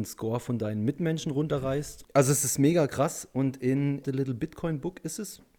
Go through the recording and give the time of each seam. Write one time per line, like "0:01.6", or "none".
0:02.0
0:04.0